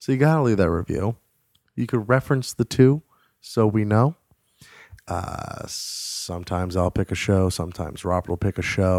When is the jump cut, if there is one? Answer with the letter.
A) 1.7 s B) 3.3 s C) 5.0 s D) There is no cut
C